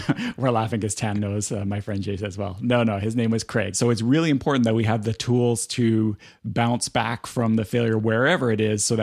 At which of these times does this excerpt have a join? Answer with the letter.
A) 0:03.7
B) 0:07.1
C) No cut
A